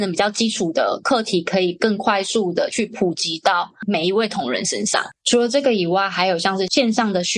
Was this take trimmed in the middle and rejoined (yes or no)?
no